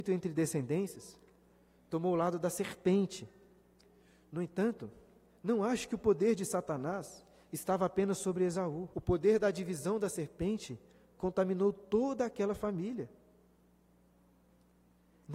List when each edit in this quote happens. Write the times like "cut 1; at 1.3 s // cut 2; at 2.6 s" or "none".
cut 1; at 8.9 s